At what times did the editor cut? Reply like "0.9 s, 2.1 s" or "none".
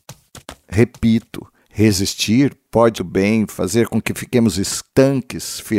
3.0 s